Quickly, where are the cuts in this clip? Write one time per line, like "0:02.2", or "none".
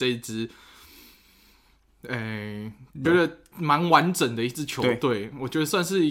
0:03.0